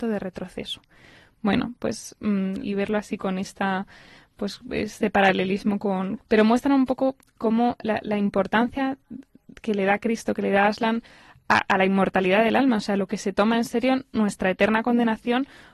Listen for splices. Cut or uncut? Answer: cut